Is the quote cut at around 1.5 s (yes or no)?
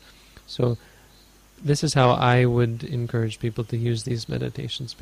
no